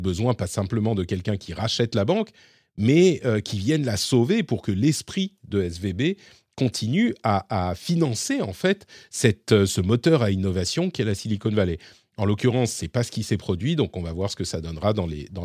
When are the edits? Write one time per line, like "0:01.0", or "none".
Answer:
none